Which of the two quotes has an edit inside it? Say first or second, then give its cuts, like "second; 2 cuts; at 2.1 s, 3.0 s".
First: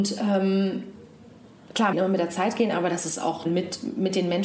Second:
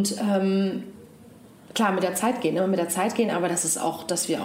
first; 2 cuts; at 1.9 s, 3.4 s